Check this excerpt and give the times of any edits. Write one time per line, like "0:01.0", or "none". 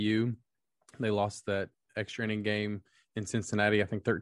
none